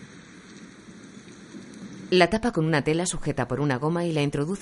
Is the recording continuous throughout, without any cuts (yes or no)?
yes